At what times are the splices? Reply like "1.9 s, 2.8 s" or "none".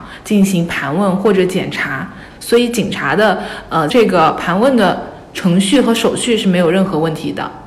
2.3 s, 3.9 s